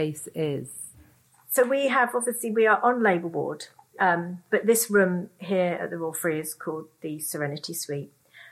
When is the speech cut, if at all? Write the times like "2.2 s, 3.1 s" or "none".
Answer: none